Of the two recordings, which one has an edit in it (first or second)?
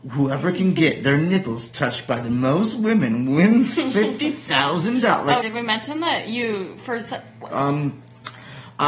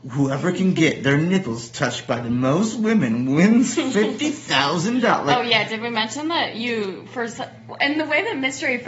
first